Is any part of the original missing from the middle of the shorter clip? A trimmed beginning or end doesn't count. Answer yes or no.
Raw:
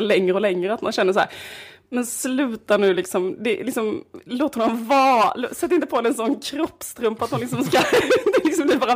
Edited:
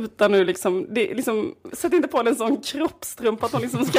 yes